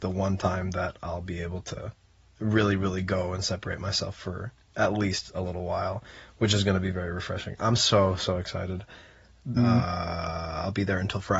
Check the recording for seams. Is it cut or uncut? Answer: cut